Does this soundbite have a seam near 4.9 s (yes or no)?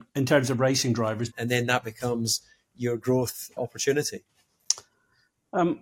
no